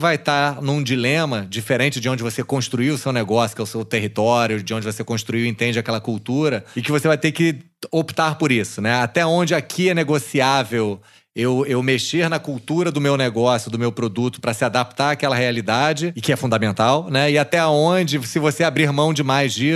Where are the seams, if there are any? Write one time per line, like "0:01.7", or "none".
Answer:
none